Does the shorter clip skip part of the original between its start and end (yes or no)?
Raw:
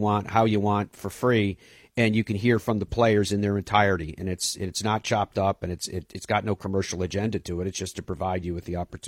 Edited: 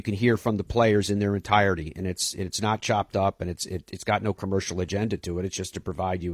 no